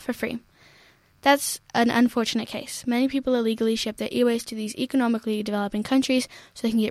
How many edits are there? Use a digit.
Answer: 0